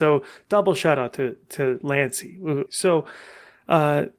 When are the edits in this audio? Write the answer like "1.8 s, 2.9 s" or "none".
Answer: 2.7 s